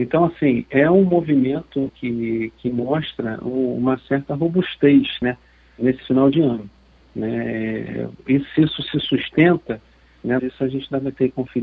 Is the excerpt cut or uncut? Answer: cut